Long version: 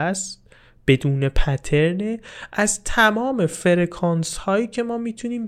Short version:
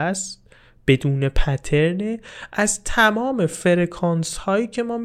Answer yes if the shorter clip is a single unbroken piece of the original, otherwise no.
yes